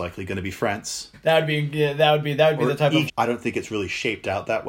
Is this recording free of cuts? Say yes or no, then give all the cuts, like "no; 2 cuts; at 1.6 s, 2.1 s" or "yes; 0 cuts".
no; 2 cuts; at 1.1 s, 3.1 s